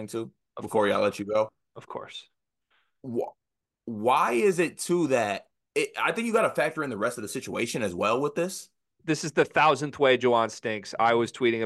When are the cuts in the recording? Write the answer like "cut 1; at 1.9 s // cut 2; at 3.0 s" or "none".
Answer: cut 1; at 5.7 s // cut 2; at 9.0 s